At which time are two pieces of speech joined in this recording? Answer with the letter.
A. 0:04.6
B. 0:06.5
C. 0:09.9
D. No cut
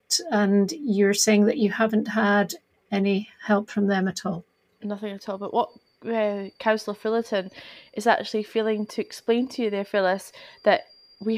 D